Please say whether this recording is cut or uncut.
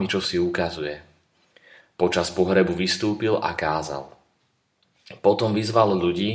cut